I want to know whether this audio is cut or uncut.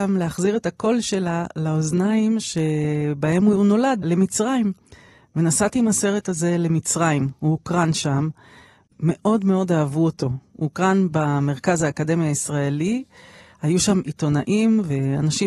cut